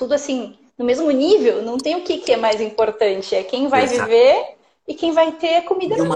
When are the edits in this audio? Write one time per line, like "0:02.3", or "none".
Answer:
none